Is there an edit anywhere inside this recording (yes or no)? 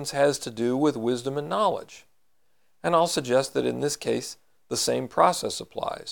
no